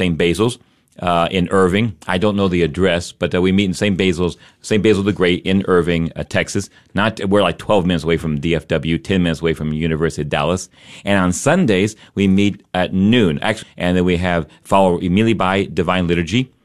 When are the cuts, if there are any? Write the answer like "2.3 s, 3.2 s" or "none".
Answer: 13.6 s